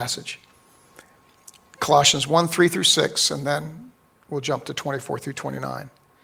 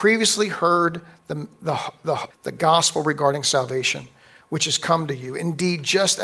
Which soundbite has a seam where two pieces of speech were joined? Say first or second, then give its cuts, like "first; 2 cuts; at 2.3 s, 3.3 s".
second; 1 cut; at 2.3 s